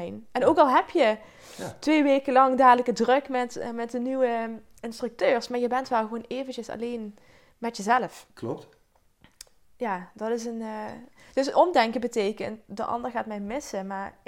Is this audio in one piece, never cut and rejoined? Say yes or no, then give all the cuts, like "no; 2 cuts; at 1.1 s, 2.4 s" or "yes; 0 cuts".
yes; 0 cuts